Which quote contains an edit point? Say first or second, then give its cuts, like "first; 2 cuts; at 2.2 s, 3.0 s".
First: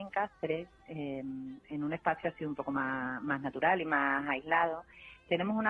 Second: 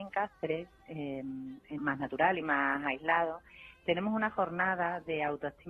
second; 1 cut; at 1.8 s